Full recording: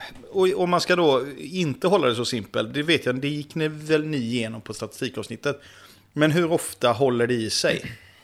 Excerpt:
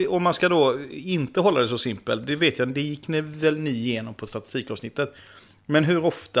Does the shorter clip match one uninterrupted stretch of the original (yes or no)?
yes